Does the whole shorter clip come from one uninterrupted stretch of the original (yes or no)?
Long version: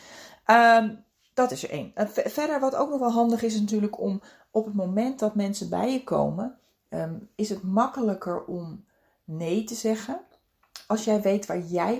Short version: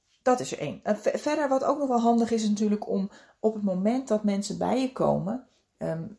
yes